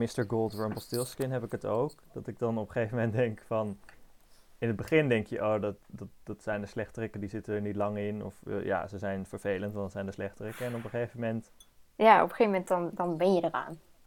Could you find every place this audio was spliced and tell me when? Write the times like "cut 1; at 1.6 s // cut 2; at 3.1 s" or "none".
none